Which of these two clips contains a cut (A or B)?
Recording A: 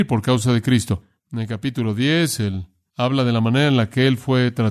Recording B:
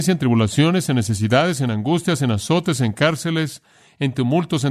A